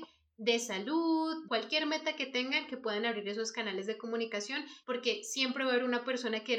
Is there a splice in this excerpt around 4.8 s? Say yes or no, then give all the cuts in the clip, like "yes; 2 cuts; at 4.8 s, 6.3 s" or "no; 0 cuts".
yes; 2 cuts; at 1.5 s, 4.8 s